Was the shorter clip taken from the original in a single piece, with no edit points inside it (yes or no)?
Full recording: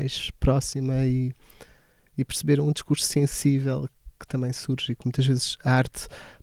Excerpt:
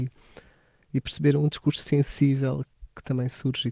yes